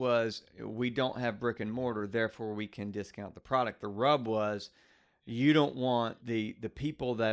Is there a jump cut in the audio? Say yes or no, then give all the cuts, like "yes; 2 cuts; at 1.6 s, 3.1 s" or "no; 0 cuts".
yes; 1 cut; at 6.2 s